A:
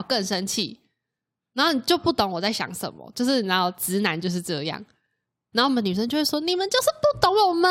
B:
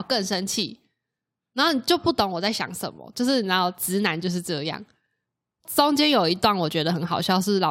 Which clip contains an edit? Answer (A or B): A